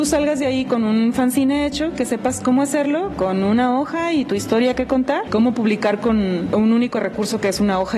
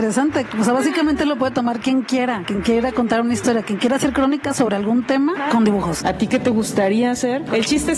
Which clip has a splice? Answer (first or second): second